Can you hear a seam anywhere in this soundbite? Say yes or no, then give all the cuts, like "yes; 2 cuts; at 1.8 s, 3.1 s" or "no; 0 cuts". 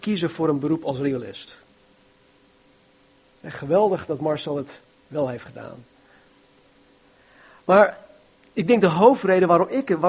no; 0 cuts